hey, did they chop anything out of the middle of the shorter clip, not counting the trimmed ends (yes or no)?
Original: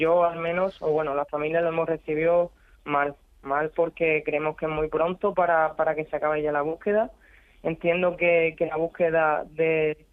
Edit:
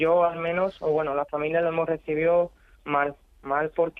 no